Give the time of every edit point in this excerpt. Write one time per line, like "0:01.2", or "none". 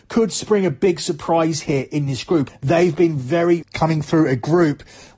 0:02.5
0:03.6